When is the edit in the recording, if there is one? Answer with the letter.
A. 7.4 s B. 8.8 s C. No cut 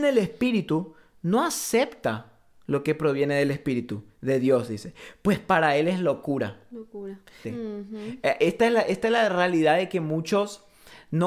A